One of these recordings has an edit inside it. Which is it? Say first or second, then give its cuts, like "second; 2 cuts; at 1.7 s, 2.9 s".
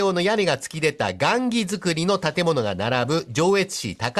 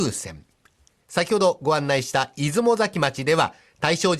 second; 1 cut; at 1.0 s